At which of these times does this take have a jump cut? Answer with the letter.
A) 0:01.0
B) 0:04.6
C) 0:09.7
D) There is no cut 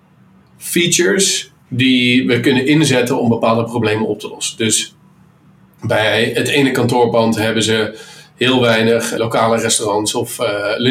D